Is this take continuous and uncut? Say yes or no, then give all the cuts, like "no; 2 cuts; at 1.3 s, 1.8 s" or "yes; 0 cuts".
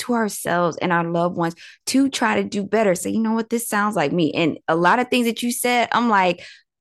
yes; 0 cuts